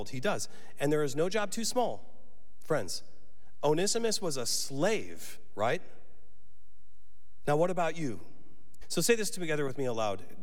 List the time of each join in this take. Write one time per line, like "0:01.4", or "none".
0:07.5
0:08.8